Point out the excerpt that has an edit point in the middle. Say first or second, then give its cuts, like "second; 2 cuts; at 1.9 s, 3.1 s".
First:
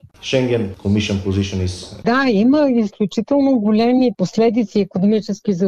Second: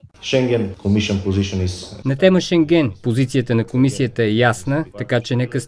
first; 1 cut; at 2.0 s